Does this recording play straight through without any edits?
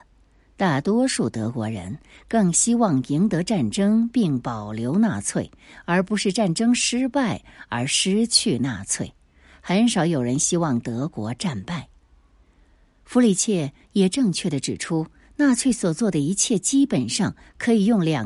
yes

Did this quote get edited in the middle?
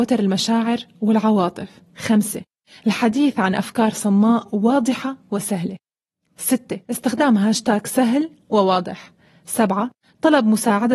yes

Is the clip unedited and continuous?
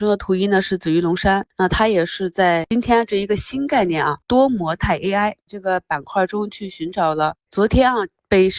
yes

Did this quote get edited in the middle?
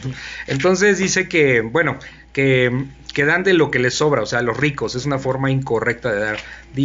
no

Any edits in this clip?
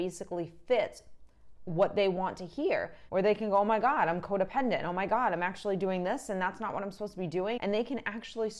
yes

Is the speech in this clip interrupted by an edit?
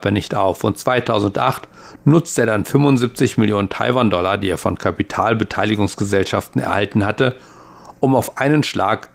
no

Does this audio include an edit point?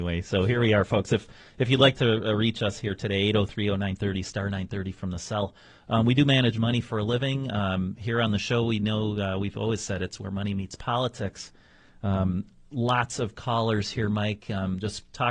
no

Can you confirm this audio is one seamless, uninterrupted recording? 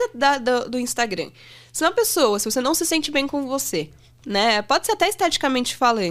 yes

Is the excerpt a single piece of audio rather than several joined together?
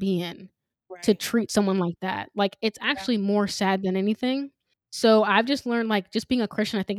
no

